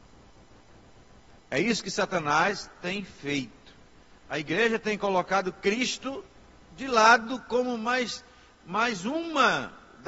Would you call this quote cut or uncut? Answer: uncut